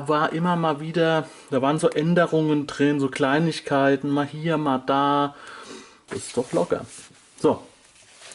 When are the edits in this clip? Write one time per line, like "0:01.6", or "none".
0:06.1